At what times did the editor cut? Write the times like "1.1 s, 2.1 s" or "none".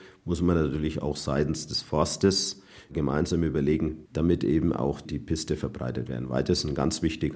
4.1 s